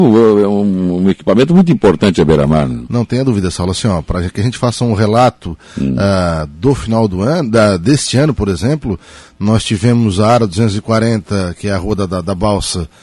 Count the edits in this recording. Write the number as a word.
zero